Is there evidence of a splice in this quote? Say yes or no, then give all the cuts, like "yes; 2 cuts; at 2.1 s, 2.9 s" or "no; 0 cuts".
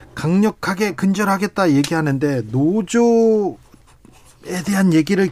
no; 0 cuts